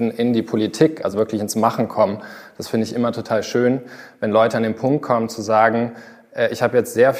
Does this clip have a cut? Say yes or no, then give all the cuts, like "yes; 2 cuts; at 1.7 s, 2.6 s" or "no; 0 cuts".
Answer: no; 0 cuts